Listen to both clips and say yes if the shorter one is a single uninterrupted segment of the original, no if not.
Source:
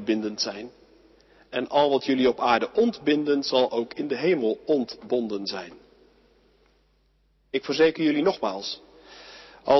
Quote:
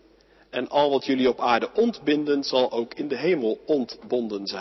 yes